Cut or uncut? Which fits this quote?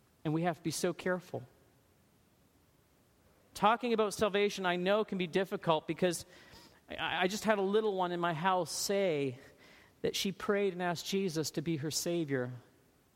uncut